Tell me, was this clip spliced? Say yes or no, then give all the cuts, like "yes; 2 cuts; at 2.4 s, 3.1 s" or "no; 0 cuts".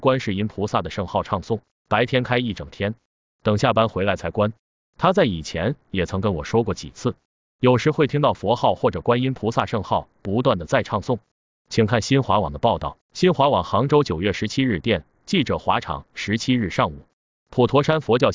yes; 1 cut; at 13.0 s